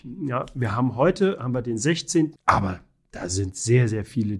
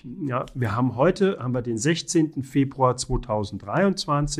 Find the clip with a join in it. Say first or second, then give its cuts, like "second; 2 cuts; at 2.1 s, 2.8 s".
first; 1 cut; at 2.4 s